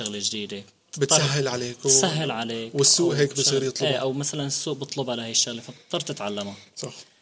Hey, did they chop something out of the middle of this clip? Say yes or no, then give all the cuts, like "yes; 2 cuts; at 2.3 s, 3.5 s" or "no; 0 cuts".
no; 0 cuts